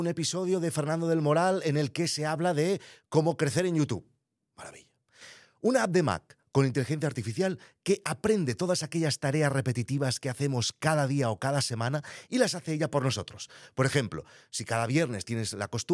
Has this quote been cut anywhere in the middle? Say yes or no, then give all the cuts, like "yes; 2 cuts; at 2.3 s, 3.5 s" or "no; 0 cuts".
no; 0 cuts